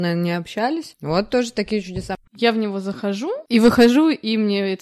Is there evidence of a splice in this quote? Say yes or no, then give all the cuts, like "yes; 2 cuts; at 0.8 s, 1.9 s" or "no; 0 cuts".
yes; 2 cuts; at 2.3 s, 3.5 s